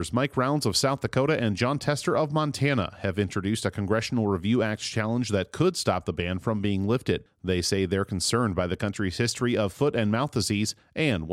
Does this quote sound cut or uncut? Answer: uncut